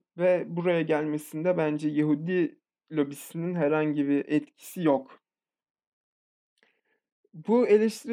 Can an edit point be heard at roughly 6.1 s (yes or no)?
no